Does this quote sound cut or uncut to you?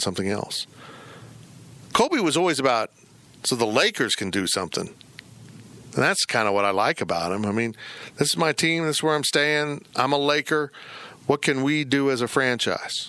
uncut